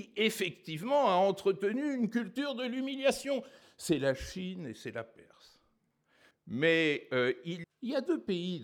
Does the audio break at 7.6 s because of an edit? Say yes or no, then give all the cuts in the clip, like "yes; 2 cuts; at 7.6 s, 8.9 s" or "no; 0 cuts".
yes; 3 cuts; at 3.6 s, 6.3 s, 7.6 s